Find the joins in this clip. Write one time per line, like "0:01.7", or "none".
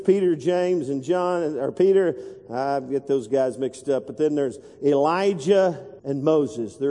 0:06.0